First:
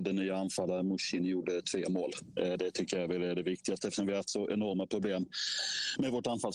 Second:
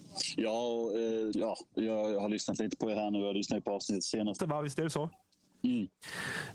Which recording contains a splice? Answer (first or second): second